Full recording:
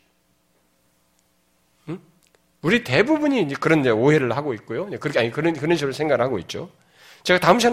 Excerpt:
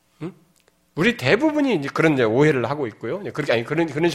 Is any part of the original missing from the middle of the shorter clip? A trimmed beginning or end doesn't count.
no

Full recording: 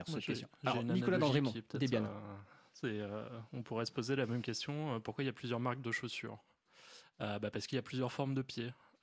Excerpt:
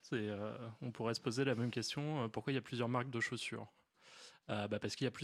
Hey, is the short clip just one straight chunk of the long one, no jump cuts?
yes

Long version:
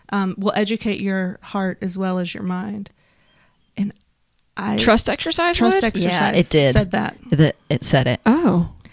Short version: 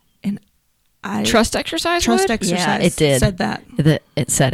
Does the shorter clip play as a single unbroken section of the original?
yes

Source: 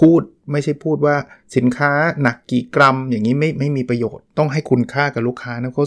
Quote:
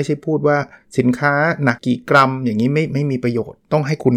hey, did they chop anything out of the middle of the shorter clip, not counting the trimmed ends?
yes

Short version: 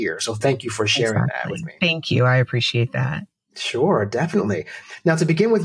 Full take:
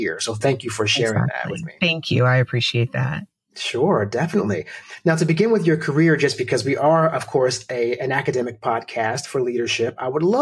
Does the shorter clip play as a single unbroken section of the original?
yes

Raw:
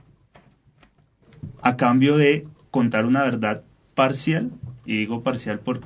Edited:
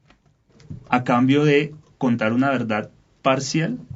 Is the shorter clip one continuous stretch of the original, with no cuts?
yes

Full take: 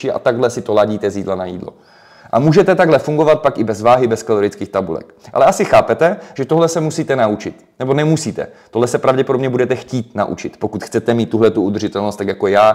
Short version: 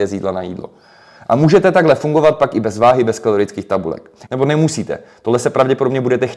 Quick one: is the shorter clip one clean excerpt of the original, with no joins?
no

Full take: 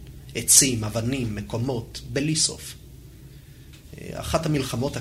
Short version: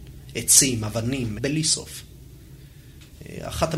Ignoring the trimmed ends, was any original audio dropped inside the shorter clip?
yes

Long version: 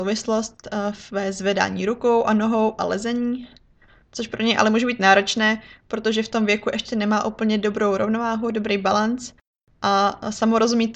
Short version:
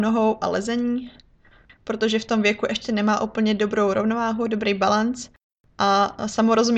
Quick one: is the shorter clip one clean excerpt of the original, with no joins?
no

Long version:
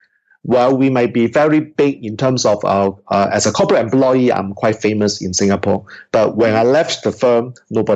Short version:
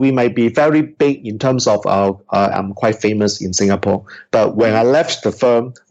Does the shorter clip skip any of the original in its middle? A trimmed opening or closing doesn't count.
yes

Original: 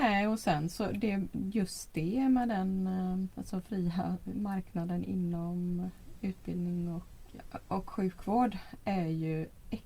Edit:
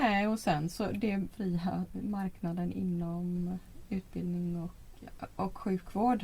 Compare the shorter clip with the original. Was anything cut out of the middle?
yes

